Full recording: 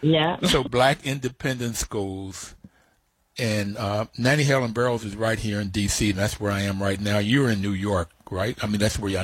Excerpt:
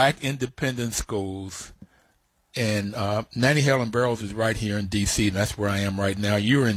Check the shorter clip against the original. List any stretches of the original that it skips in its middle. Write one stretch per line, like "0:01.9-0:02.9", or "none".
none